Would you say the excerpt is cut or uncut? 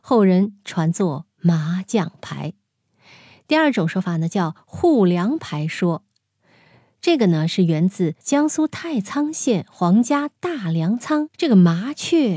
uncut